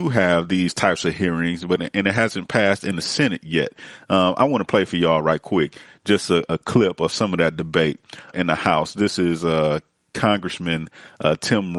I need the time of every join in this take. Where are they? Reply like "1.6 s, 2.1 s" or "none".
8.3 s